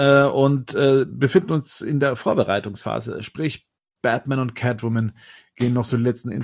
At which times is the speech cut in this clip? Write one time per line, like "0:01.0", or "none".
none